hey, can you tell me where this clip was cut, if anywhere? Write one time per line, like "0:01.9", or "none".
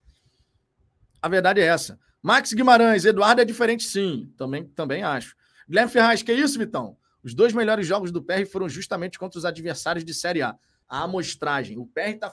0:01.1
0:10.8